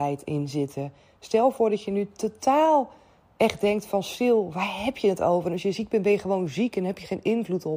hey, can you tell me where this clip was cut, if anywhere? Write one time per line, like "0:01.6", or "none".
none